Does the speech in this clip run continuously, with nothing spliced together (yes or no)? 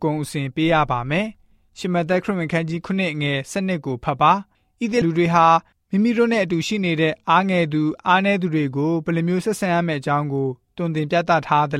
no